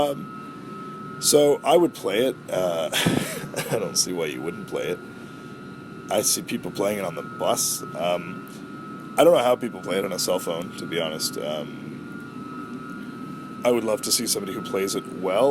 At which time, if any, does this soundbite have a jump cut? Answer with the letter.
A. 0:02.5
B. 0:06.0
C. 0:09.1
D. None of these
D